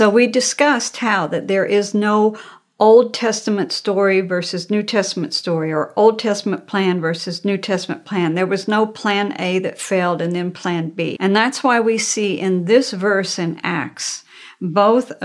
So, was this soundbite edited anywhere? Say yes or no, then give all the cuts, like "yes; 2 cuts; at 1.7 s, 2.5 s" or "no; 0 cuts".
yes; 1 cut; at 11.2 s